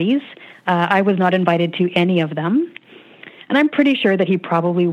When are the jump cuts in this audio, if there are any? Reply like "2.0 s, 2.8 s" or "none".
3.5 s